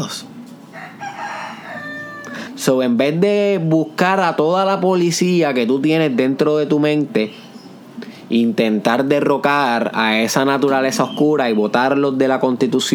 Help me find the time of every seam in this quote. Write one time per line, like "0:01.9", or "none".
0:02.5